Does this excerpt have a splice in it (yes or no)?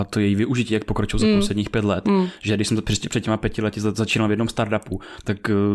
no